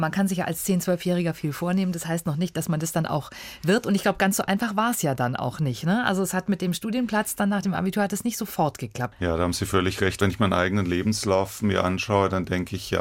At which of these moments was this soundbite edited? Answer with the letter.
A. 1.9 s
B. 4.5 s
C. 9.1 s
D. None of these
C